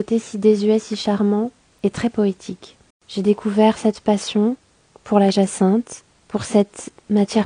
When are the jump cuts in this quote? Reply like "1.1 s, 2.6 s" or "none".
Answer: 2.9 s